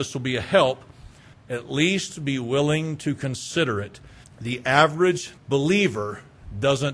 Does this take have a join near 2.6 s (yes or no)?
no